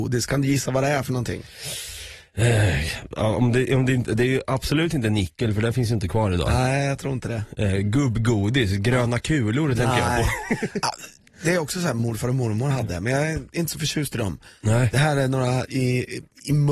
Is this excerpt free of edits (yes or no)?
yes